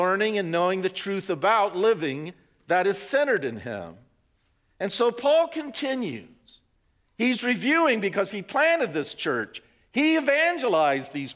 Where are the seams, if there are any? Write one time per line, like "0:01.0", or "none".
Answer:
none